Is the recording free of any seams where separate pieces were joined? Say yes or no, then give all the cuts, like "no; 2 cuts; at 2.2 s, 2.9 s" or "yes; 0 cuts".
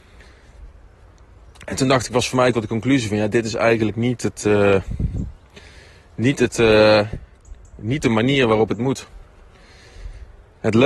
yes; 0 cuts